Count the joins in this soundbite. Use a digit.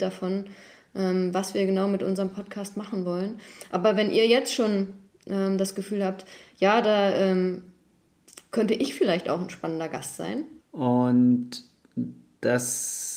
1